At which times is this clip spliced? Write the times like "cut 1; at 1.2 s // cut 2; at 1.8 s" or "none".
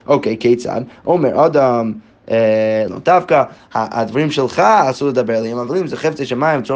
cut 1; at 2.9 s